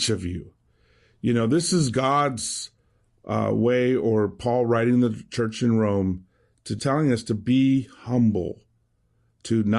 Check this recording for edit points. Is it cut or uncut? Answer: cut